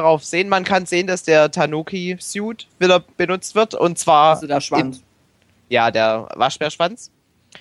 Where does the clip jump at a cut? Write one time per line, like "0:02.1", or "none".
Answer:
none